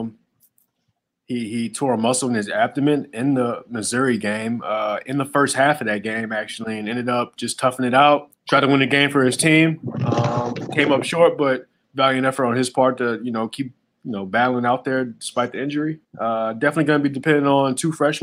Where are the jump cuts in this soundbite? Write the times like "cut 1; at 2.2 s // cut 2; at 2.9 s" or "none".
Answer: cut 1; at 8.3 s // cut 2; at 16.0 s

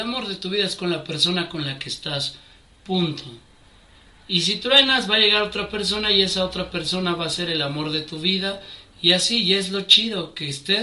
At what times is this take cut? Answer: none

